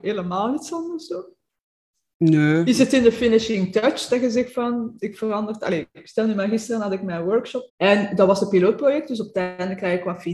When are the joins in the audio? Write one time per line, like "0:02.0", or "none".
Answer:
0:05.0
0:07.7